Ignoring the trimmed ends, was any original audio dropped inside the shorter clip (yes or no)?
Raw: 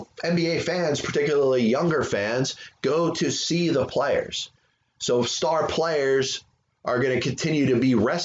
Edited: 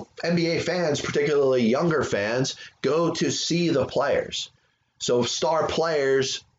no